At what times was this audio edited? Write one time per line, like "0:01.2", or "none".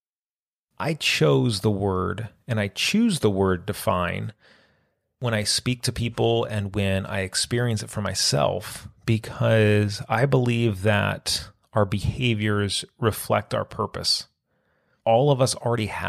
none